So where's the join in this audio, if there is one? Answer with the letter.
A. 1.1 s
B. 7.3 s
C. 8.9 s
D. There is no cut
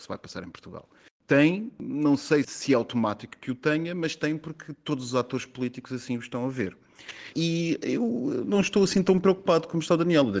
B